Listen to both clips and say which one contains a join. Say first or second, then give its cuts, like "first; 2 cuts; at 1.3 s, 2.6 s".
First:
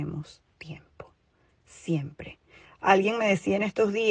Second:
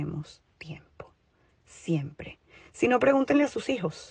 first; 1 cut; at 2.6 s